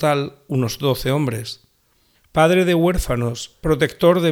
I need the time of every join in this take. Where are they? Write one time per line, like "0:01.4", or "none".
0:02.1